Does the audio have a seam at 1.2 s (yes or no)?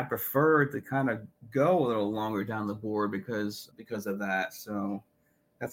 no